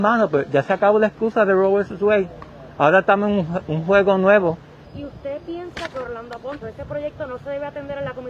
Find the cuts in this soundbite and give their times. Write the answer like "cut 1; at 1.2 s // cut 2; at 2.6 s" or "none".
cut 1; at 4.8 s // cut 2; at 6.6 s